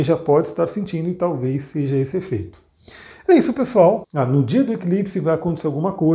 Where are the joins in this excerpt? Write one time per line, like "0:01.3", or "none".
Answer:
0:04.0

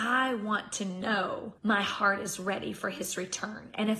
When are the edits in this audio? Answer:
0:01.6

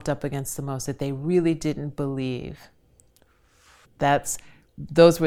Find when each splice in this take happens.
0:03.8

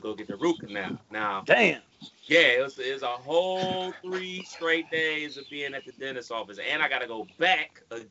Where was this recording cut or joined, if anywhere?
none

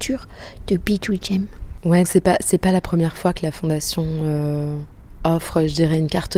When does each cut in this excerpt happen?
0:02.0

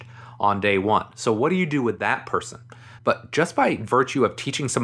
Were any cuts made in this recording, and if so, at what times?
0:03.0

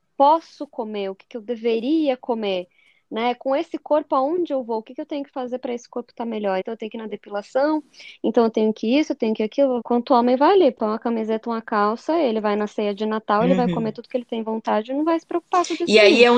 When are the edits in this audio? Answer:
0:06.6
0:09.8

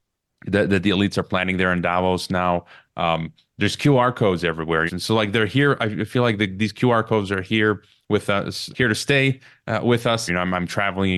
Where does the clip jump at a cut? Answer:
0:04.9
0:08.7
0:10.3

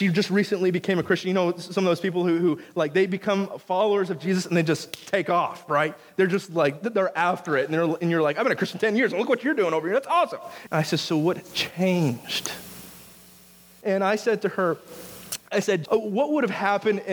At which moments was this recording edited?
0:10.7
0:13.8
0:15.9

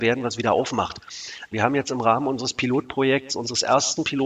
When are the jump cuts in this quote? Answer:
0:01.5

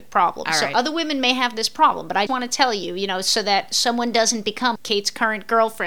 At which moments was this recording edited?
0:02.3
0:04.8

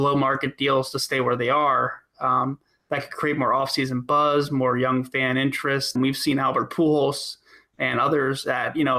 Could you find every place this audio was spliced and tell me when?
0:06.0

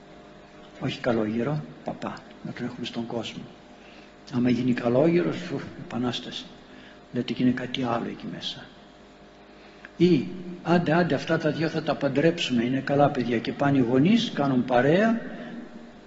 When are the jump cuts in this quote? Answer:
none

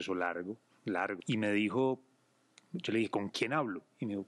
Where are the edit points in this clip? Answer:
0:01.2

